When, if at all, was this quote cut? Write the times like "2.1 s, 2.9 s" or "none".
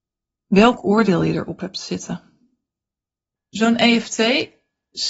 3.4 s